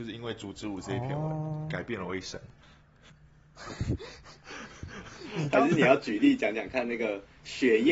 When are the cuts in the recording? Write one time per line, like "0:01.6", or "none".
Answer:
none